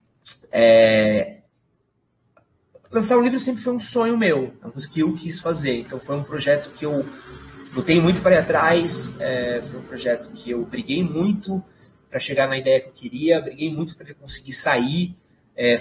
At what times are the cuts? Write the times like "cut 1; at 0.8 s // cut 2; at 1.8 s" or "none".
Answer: none